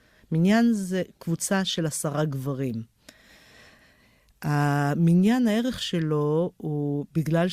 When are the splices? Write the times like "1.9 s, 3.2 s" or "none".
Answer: none

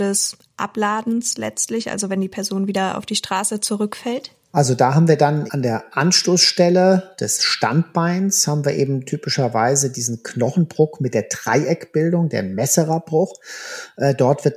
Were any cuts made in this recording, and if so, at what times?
5.5 s

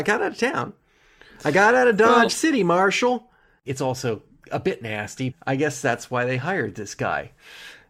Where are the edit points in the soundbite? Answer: 3.7 s, 5.3 s

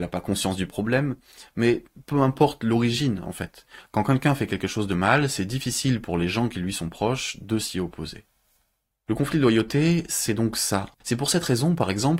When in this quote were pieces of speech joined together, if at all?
10.9 s

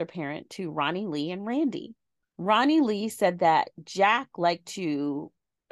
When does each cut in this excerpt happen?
none

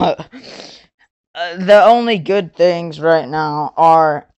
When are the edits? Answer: none

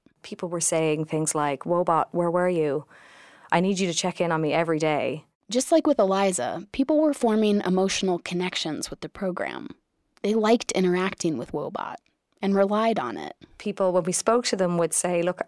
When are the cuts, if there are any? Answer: none

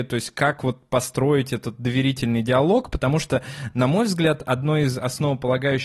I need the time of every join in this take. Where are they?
none

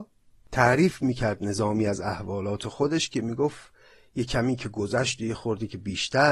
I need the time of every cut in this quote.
none

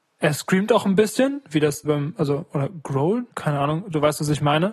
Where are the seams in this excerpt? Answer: 1.9 s, 3.3 s

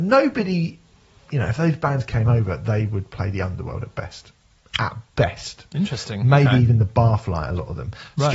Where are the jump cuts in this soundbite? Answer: none

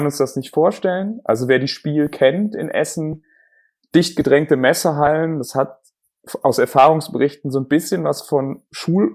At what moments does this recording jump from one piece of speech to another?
none

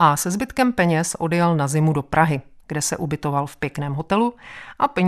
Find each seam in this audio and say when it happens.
none

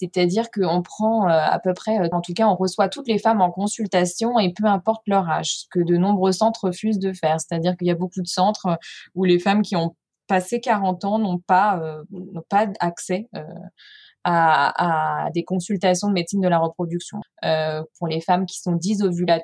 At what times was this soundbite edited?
2.1 s, 17.2 s

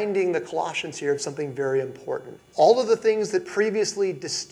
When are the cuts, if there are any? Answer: 2.4 s

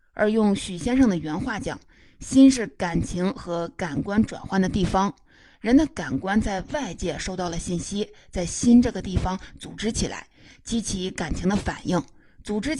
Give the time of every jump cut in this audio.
none

